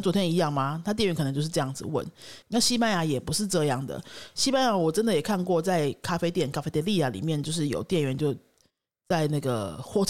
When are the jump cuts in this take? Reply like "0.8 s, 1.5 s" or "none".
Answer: 2.4 s